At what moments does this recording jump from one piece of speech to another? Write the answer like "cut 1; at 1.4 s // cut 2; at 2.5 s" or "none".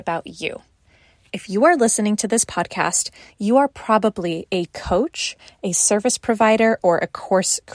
none